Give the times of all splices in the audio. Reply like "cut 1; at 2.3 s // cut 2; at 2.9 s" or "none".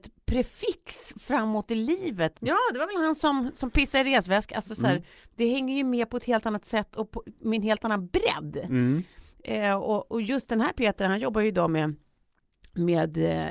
cut 1; at 2.3 s